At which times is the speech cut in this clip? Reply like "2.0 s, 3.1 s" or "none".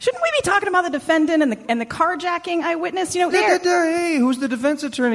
3.3 s

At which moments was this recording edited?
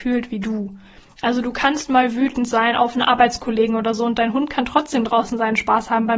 none

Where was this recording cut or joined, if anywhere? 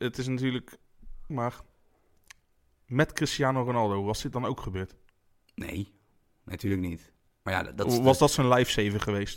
1.3 s

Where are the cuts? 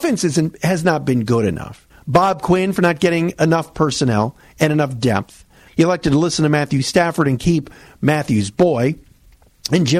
1.9 s, 5.7 s

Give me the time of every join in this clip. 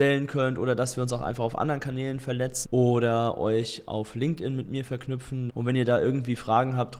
2.6 s, 5.5 s

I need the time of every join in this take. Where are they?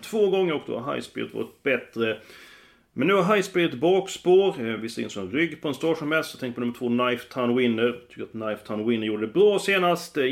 none

